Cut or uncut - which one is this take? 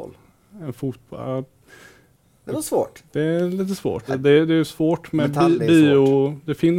cut